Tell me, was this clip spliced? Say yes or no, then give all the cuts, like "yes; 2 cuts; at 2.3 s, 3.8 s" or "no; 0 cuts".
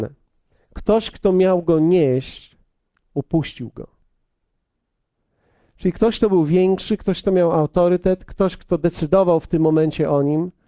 no; 0 cuts